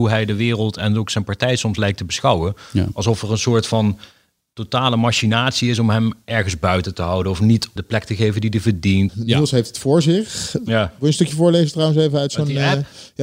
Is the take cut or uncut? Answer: cut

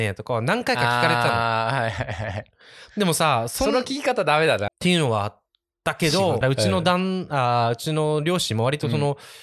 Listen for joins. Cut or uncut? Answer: cut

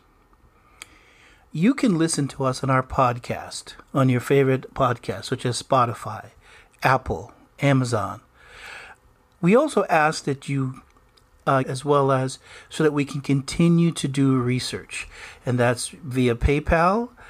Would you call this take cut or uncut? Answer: cut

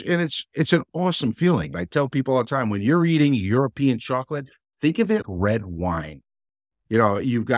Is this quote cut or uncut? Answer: cut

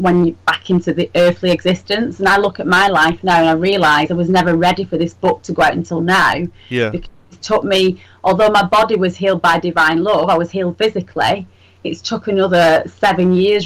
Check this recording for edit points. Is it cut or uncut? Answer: uncut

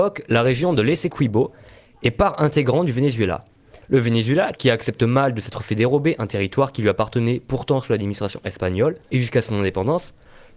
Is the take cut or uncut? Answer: cut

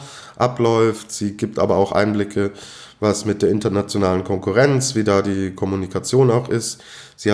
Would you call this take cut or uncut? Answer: uncut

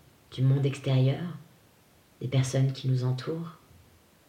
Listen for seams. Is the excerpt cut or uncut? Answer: uncut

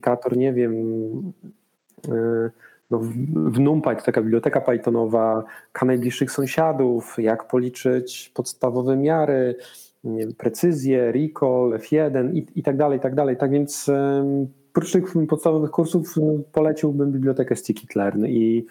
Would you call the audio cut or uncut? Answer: cut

